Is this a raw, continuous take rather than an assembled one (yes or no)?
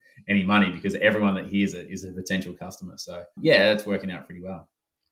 no